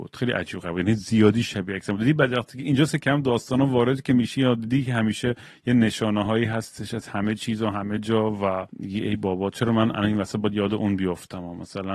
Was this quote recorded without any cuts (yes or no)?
no